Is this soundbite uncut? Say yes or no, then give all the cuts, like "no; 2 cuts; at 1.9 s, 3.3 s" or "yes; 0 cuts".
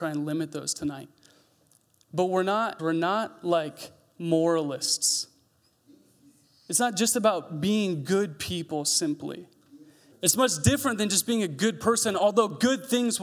no; 2 cuts; at 2.8 s, 10.1 s